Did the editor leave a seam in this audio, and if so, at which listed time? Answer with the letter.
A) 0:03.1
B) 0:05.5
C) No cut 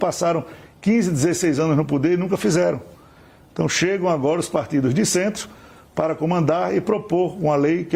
C